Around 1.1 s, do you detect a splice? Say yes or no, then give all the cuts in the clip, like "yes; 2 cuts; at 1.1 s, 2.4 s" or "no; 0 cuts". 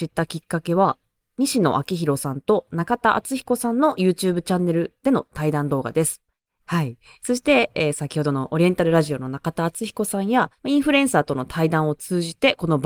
no; 2 cuts; at 6.6 s, 10.6 s